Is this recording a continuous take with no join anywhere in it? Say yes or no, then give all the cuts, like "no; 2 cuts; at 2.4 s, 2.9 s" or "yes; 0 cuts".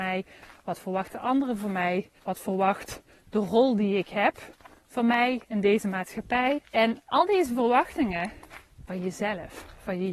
no; 3 cuts; at 2.2 s, 6.6 s, 8.9 s